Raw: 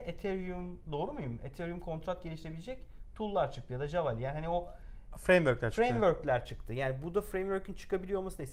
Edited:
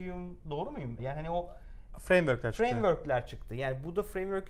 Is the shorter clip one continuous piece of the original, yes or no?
no